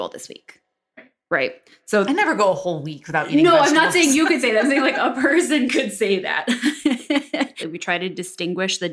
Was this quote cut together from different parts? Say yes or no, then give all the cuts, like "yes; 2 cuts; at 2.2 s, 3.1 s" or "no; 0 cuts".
yes; 1 cut; at 7.6 s